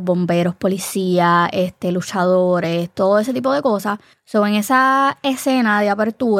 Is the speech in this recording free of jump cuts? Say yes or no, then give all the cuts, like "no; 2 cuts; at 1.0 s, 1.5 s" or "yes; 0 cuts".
no; 1 cut; at 4.1 s